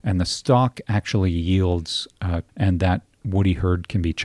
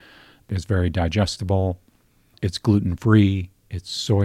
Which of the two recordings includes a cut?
first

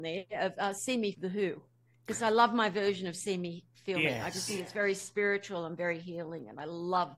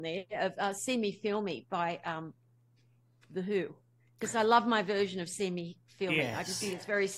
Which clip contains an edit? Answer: first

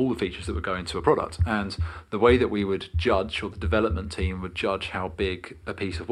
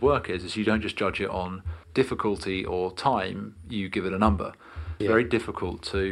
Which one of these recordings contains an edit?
second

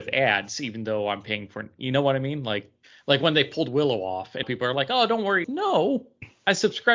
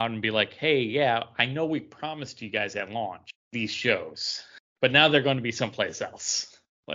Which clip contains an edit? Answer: first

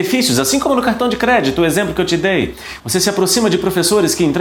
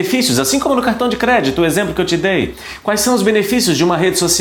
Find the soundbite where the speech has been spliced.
first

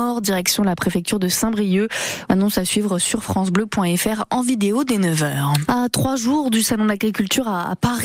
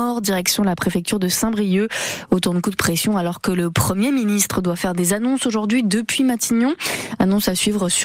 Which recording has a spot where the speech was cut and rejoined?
first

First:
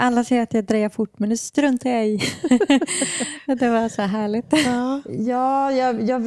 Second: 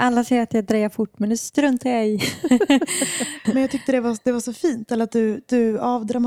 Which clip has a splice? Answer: second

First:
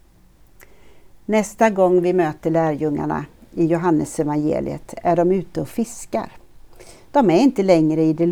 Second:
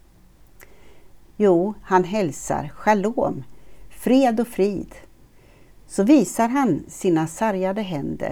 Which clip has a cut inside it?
second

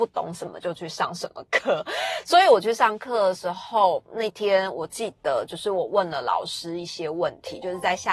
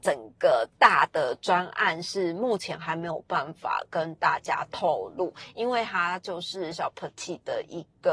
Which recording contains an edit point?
second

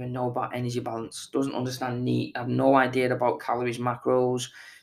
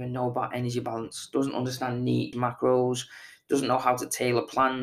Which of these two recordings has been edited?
second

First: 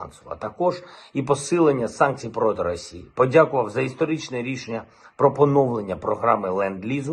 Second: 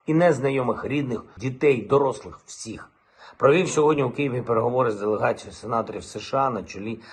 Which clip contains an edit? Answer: second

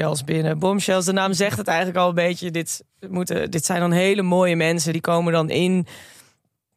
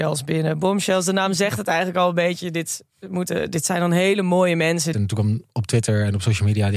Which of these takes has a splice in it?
second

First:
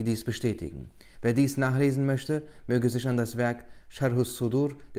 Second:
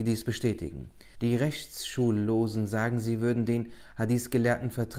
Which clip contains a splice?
second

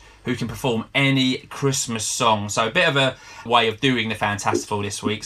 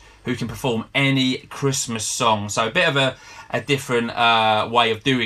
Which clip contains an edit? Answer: first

